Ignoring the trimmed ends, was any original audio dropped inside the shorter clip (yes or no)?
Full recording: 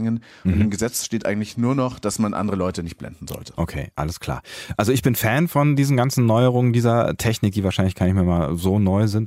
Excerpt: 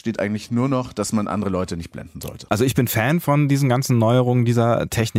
yes